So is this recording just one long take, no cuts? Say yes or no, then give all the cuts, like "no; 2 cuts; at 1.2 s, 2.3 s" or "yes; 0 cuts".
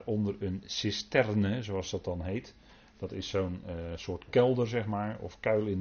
yes; 0 cuts